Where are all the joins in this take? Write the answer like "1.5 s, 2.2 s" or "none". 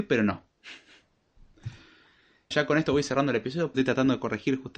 2.5 s, 3.7 s